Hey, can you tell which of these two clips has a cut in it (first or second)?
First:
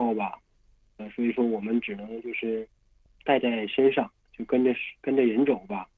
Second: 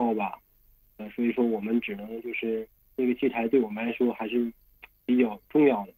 second